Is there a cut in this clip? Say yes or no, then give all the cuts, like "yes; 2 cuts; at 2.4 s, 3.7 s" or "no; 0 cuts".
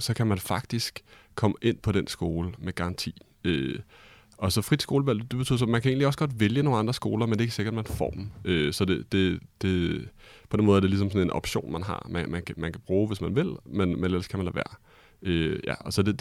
no; 0 cuts